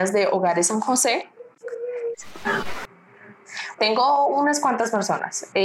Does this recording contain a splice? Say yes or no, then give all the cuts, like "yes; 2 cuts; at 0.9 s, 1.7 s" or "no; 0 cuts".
yes; 2 cuts; at 2.1 s, 3.8 s